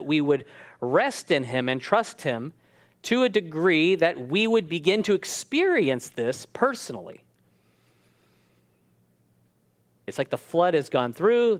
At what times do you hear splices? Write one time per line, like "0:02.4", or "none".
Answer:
0:10.1